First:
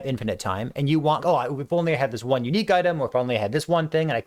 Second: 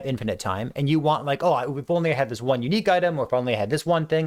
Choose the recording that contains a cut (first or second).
first